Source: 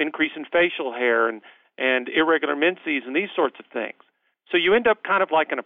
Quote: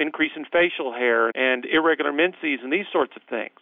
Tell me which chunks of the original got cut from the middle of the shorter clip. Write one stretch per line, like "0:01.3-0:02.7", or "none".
0:01.3-0:01.7